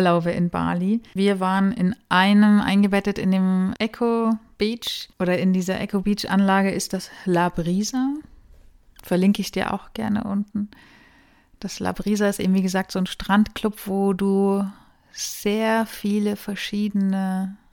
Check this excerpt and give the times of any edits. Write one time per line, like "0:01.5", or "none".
0:01.2
0:05.1